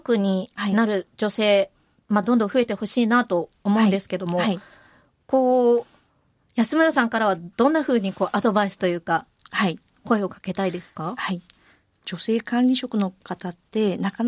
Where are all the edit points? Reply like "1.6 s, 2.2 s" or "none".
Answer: none